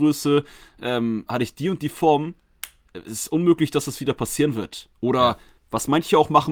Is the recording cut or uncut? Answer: uncut